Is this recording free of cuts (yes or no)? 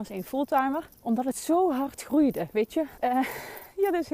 no